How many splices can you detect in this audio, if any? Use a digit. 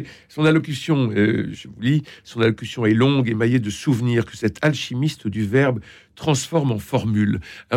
1